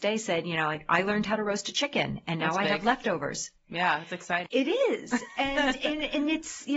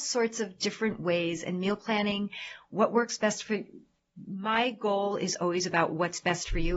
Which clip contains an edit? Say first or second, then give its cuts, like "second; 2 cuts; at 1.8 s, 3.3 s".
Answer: first; 1 cut; at 4.5 s